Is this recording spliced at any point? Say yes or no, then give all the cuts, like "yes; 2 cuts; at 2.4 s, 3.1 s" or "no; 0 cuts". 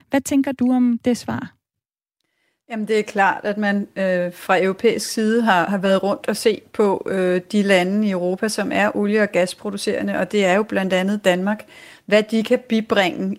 no; 0 cuts